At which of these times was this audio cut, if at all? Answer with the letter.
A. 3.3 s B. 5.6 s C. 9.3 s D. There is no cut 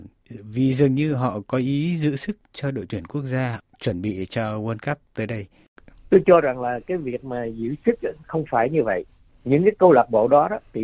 C